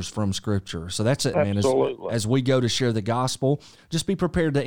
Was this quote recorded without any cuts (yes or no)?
no